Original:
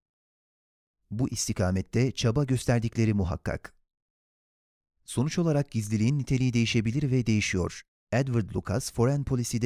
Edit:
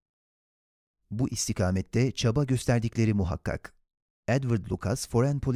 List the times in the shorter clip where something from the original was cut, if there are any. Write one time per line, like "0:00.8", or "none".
0:04.2